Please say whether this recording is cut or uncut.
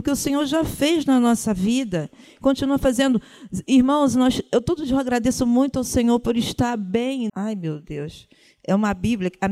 cut